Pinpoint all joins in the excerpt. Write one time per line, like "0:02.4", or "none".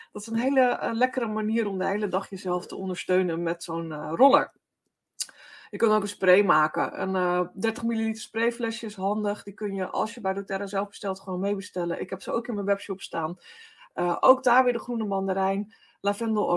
none